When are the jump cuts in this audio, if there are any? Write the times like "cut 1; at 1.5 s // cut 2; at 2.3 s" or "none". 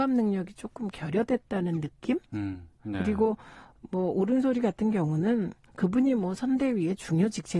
cut 1; at 2.8 s